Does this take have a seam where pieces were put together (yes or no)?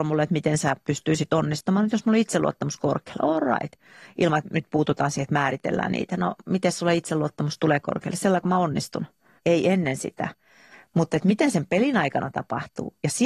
yes